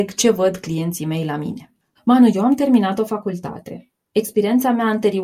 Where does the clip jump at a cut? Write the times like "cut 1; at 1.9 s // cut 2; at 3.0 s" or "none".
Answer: cut 1; at 2.0 s // cut 2; at 4.0 s

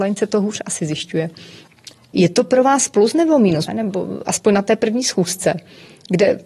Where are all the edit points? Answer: cut 1; at 2.1 s // cut 2; at 3.7 s

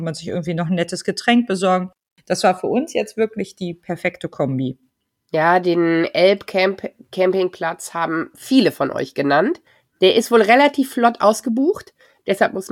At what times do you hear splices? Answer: none

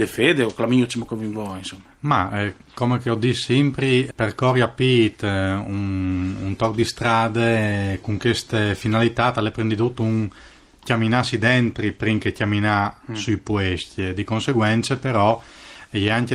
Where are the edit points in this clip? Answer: none

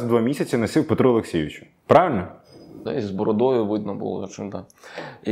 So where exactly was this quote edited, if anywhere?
cut 1; at 2.9 s

